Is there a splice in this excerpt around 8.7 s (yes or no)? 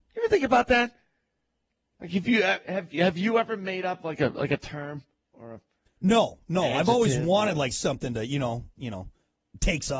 yes